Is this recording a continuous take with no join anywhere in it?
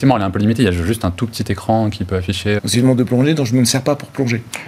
no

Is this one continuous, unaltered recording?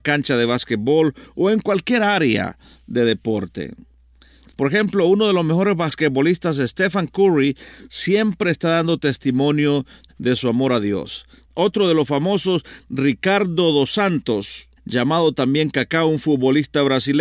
no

